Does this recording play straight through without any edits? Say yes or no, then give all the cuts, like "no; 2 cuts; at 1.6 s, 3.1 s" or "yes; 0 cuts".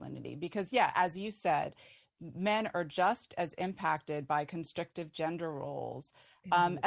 yes; 0 cuts